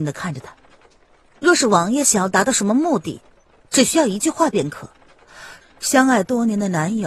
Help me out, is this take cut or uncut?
cut